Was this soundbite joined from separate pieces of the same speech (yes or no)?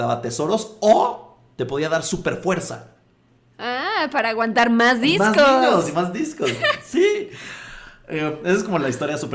no